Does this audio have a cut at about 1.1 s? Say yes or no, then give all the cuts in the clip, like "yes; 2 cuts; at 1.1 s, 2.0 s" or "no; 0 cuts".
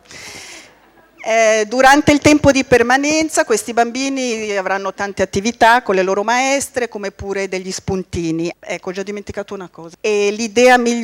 no; 2 cuts; at 8.5 s, 9.9 s